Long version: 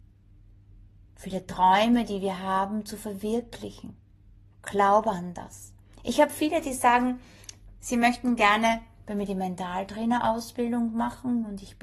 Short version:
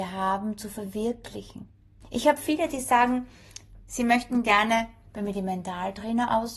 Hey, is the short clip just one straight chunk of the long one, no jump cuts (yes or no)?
no